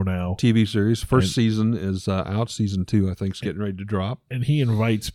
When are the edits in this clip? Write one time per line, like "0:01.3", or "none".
none